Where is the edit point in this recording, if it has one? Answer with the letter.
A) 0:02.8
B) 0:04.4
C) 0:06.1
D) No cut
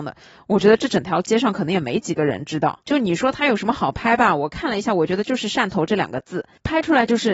A